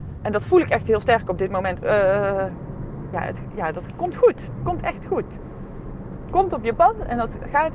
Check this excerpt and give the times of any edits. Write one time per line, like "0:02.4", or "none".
0:01.8
0:03.1